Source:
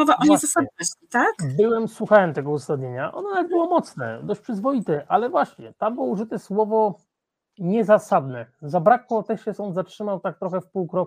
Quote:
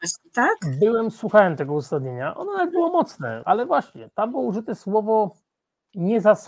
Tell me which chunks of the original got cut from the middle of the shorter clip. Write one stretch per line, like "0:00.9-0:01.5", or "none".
0:04.2-0:05.1